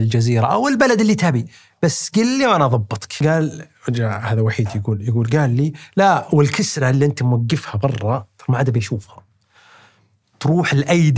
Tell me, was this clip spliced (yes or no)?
no